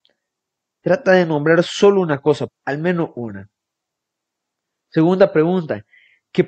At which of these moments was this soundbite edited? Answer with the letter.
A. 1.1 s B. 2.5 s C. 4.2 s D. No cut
B